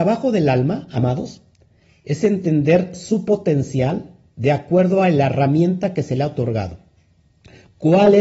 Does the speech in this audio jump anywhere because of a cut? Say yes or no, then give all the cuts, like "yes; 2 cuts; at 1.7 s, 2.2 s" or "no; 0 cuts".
no; 0 cuts